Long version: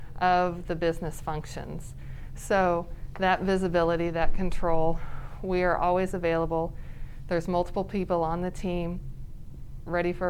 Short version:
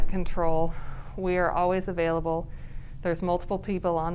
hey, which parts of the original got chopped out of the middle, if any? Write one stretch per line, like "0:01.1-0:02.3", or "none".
none